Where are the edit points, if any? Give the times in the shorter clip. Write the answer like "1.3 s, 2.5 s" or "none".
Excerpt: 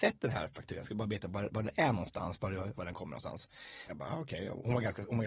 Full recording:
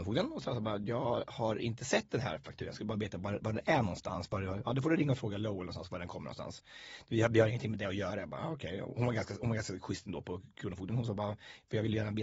2.7 s, 3.9 s